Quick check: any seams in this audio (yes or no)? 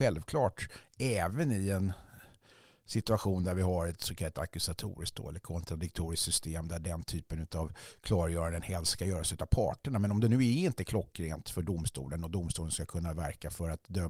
no